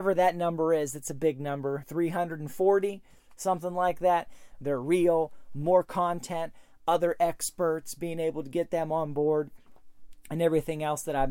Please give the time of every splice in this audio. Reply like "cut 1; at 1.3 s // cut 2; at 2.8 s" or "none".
cut 1; at 1.8 s // cut 2; at 4.5 s

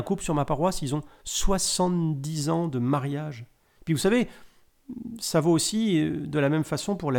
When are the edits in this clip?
none

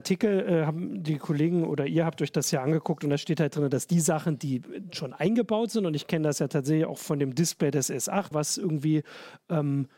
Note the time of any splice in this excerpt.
cut 1; at 8.3 s

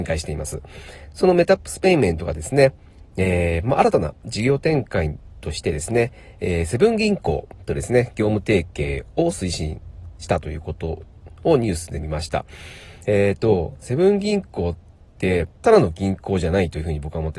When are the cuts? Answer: cut 1; at 13.0 s // cut 2; at 15.5 s

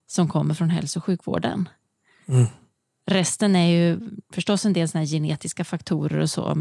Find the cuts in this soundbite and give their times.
none

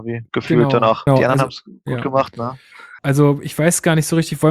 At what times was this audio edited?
cut 1; at 1.1 s // cut 2; at 3.0 s

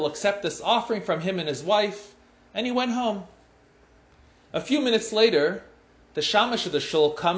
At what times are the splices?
none

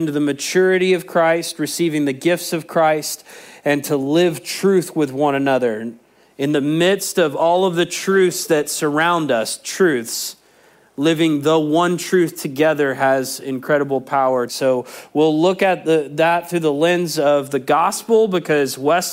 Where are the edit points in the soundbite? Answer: cut 1; at 14.5 s

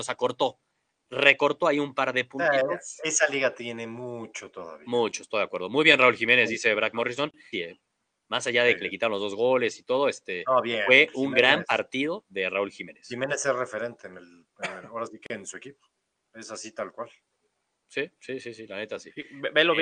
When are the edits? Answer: cut 1; at 7.5 s

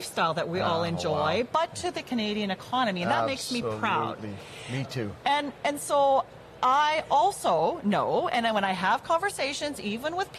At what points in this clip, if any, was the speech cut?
none

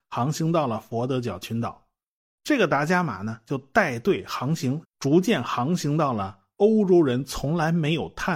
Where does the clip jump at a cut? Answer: cut 1; at 2.3 s // cut 2; at 4.8 s

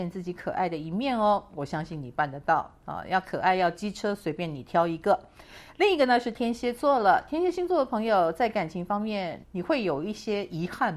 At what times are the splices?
cut 1; at 9.4 s

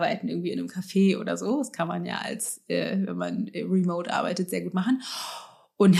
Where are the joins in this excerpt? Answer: none

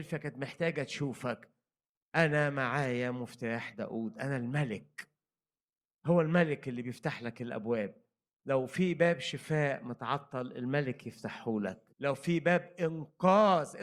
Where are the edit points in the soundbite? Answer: cut 1; at 11.9 s

